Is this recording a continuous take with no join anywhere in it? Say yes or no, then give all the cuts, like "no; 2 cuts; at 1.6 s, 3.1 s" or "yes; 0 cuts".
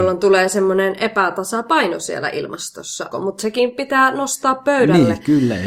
no; 1 cut; at 3.1 s